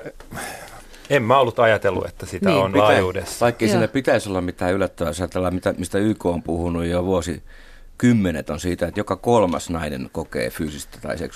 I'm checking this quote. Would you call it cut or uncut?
cut